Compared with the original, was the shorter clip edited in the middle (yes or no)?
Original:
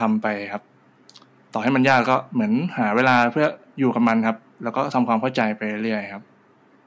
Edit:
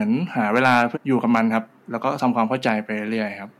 yes